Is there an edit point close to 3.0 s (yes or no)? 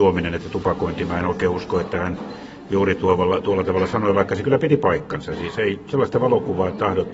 no